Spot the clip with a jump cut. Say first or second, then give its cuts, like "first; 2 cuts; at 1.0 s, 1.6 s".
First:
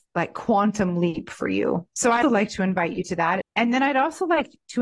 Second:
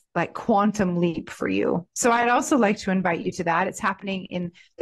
first; 2 cuts; at 2.2 s, 3.4 s